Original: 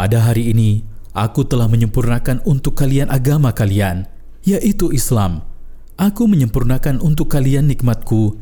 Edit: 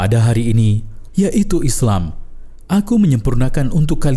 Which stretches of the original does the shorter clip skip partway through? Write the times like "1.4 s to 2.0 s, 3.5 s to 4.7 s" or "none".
1.1 s to 4.4 s